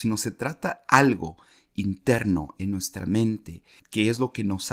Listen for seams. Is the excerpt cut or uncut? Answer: cut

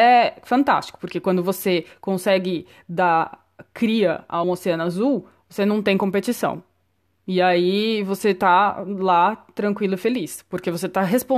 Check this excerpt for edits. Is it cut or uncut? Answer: cut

